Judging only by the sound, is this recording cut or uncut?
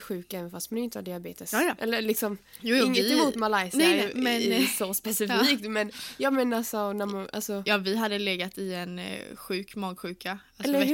uncut